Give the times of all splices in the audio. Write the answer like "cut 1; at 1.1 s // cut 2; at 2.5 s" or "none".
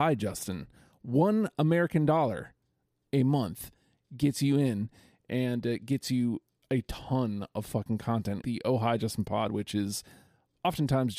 cut 1; at 8.4 s